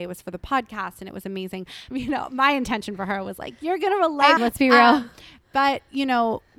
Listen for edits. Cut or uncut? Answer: cut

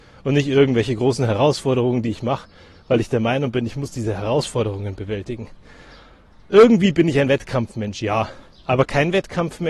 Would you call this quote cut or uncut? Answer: uncut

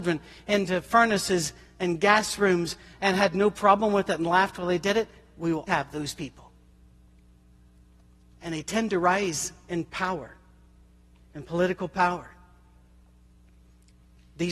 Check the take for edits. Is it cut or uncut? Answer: cut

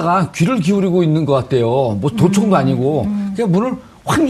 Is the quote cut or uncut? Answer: uncut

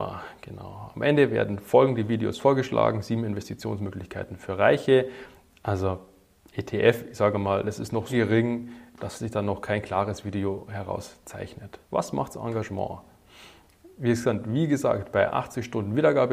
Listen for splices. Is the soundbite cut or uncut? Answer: cut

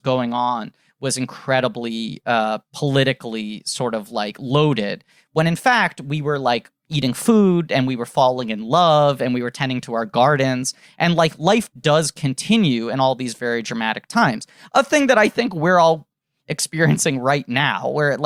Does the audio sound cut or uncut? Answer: uncut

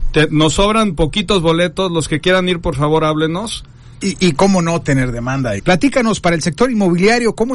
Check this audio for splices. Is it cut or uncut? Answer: cut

